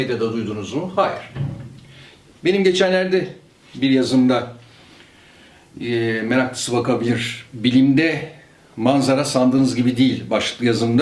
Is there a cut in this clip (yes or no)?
no